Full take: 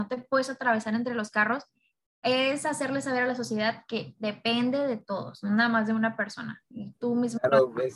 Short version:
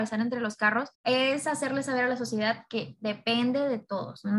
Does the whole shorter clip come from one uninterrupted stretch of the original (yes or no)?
no